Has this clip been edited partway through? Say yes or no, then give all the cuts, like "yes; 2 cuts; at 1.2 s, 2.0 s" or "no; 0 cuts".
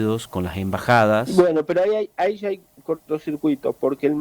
no; 0 cuts